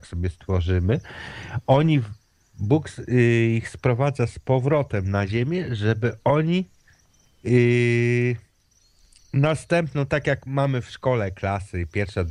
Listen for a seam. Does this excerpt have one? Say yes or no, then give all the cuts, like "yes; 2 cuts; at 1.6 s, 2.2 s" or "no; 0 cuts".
no; 0 cuts